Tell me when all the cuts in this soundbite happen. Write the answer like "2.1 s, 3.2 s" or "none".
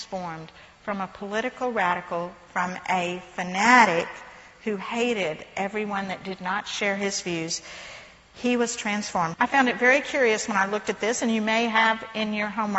9.3 s

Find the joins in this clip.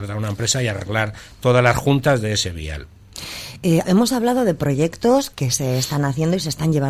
3.8 s

